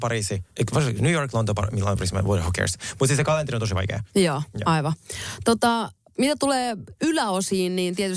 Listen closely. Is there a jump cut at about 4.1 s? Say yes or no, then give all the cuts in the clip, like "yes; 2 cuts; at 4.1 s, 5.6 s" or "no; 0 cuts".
no; 0 cuts